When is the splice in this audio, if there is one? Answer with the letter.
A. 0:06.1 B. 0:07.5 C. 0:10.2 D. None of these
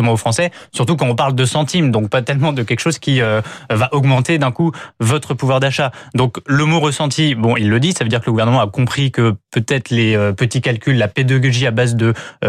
D